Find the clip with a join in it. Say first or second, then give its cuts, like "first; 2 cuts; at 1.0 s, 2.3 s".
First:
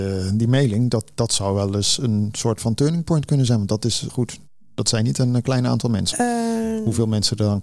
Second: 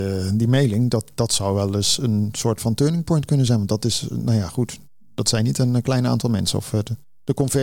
first; 2 cuts; at 4.1 s, 6.1 s